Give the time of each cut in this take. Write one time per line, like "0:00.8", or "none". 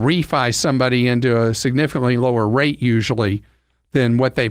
none